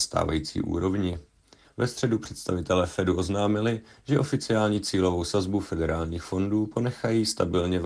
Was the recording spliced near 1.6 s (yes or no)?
yes